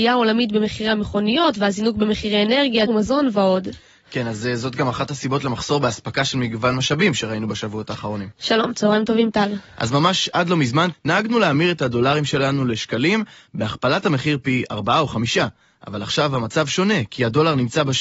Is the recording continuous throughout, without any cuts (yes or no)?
no